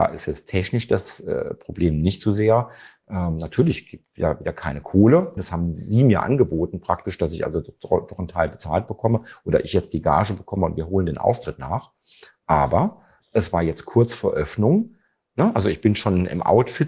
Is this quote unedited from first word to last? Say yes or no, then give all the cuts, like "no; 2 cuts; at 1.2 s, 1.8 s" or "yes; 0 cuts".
no; 1 cut; at 5.4 s